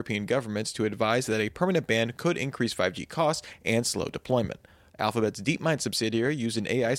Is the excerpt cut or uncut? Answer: cut